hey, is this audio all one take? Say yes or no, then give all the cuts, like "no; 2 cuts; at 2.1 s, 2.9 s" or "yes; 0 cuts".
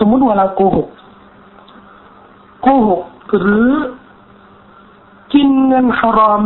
yes; 0 cuts